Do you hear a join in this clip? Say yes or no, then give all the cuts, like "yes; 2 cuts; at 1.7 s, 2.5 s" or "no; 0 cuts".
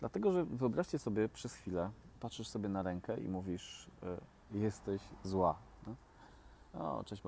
yes; 2 cuts; at 2.1 s, 4.5 s